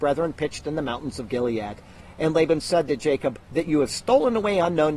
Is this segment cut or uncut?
cut